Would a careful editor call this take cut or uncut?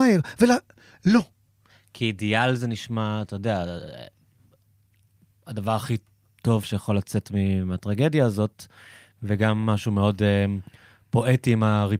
uncut